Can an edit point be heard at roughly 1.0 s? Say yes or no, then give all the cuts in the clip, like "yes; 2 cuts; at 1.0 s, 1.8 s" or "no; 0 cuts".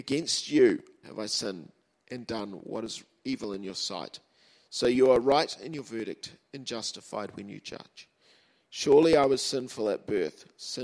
yes; 1 cut; at 1.0 s